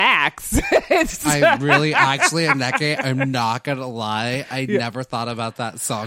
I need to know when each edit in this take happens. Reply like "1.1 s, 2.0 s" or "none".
none

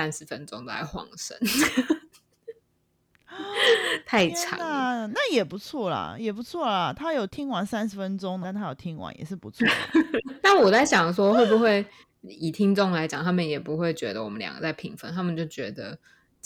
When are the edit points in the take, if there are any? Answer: 7.3 s, 8.4 s, 10.4 s

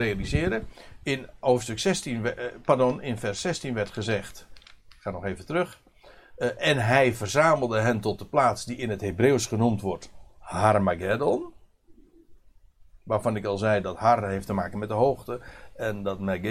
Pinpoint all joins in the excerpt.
none

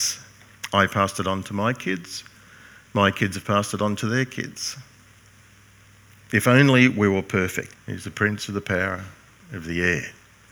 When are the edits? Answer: 7.7 s

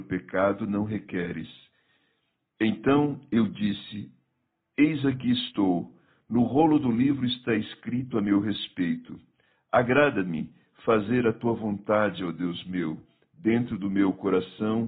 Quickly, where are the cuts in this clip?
none

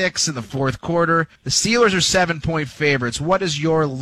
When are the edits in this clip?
1.4 s

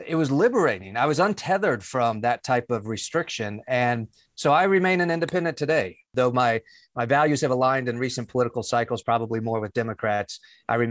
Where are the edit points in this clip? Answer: none

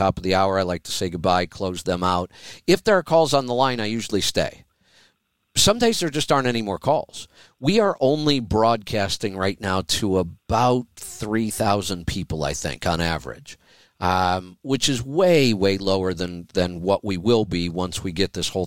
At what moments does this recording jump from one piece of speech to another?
none

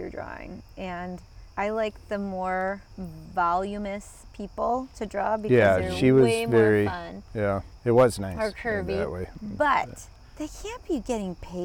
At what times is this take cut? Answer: 2.9 s

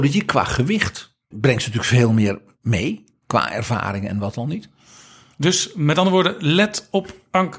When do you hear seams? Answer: 1.3 s

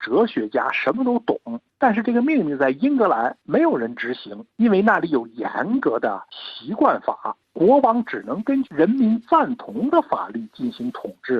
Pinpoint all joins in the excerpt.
1.7 s, 7.4 s

